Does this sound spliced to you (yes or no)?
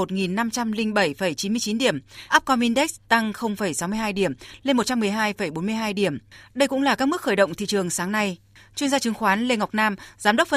yes